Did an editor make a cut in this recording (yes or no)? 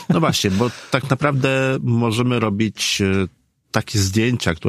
no